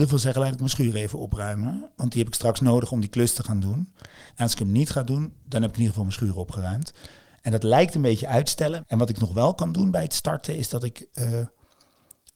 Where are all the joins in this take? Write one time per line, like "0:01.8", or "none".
0:04.3
0:08.8